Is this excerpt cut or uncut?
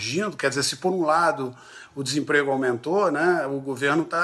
uncut